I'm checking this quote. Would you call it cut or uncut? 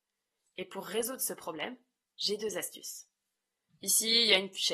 cut